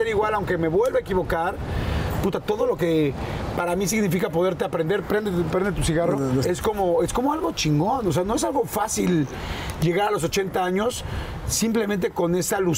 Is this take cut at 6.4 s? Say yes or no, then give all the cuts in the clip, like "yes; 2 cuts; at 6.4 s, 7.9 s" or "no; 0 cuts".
yes; 1 cut; at 6.4 s